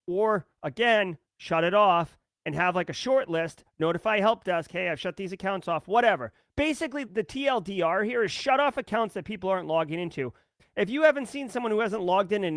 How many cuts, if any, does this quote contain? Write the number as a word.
two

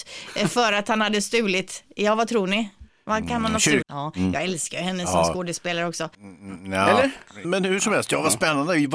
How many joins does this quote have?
three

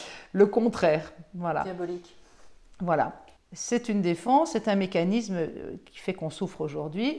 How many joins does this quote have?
one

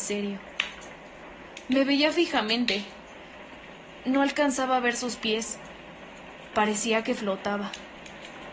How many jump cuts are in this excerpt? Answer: zero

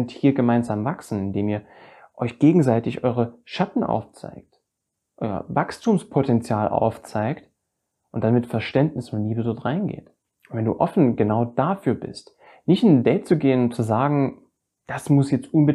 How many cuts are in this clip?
zero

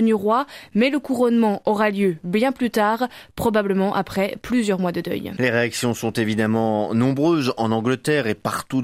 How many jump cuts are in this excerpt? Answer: one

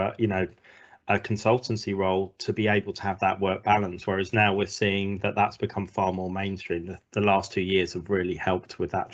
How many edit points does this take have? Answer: zero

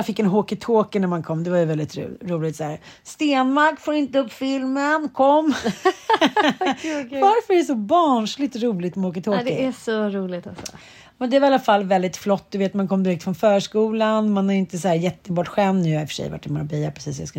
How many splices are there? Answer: zero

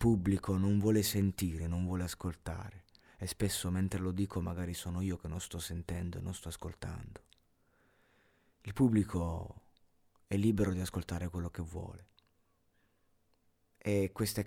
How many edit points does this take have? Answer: zero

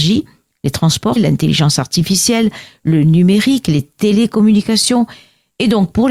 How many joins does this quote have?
one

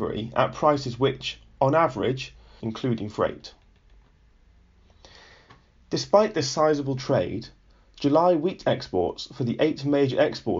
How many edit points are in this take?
one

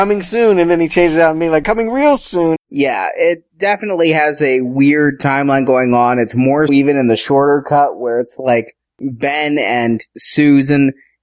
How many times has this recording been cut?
two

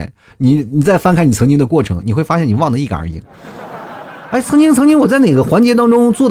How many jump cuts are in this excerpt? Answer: zero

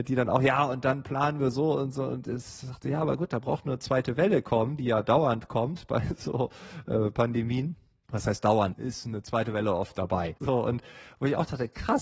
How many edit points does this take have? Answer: two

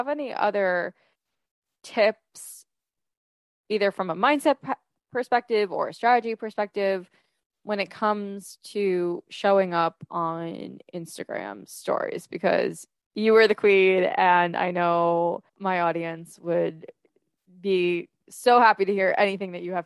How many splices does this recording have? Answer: one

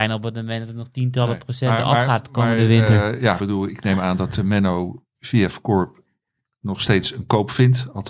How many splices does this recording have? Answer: one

